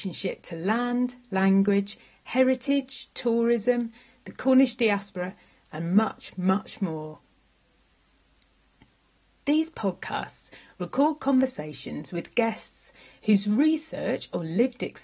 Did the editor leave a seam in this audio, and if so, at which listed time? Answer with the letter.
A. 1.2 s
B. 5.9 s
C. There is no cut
C